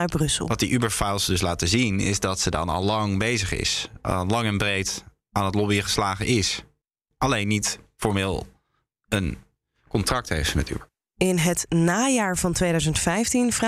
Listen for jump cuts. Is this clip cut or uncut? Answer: uncut